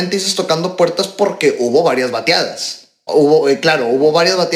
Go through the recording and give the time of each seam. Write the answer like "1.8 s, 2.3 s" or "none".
3.1 s

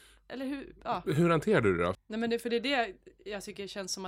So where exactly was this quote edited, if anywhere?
1.9 s

